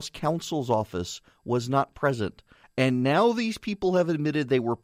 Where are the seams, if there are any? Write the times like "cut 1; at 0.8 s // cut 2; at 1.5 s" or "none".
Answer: cut 1; at 2.6 s

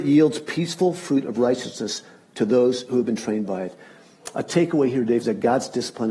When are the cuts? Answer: cut 1; at 5.2 s

